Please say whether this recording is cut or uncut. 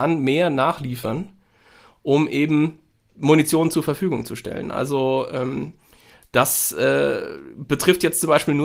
uncut